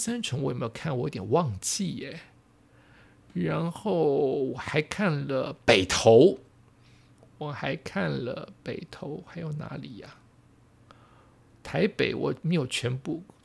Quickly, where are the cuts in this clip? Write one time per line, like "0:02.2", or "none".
none